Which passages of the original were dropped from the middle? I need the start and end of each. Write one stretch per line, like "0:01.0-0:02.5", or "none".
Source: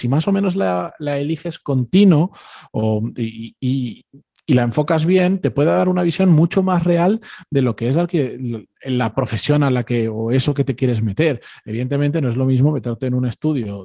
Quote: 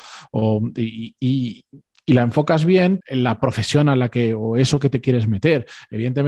0:05.4-0:08.8

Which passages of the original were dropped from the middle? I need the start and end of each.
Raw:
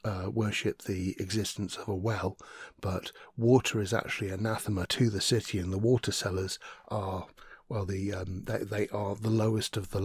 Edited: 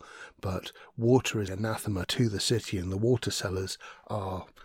0:03.9-0:04.3

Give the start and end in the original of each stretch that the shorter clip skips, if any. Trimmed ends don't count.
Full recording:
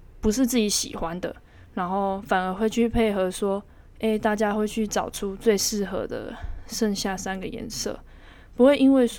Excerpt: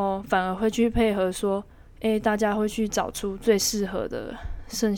none

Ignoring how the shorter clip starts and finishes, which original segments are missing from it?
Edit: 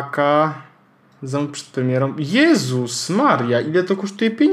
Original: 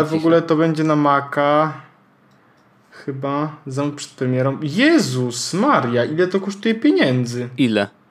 0:02.4-0:03.6

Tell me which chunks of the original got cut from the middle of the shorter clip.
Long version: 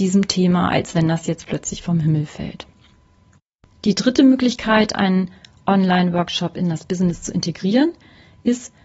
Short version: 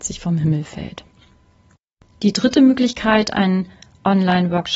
none

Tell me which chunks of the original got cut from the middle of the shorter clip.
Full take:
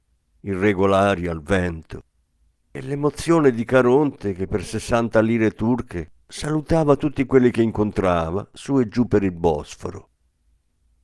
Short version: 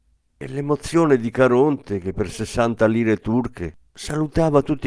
none

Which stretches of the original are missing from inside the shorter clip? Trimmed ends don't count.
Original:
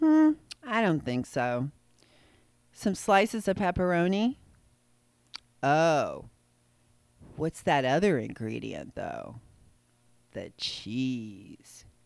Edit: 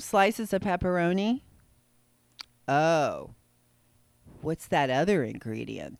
none

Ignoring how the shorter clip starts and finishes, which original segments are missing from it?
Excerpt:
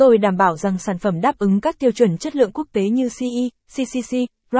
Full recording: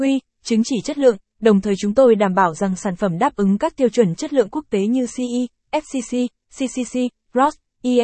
0:05.6-0:06.4

